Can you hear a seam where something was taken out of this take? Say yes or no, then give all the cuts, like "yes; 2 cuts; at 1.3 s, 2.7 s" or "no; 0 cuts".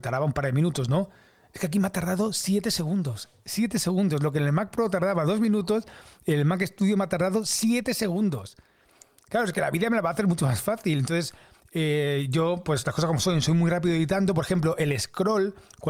no; 0 cuts